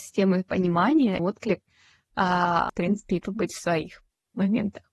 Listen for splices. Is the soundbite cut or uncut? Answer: cut